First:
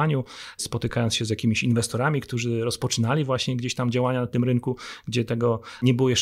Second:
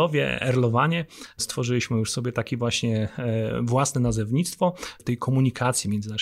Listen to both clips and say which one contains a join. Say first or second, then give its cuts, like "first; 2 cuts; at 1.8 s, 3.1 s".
second; 1 cut; at 5.0 s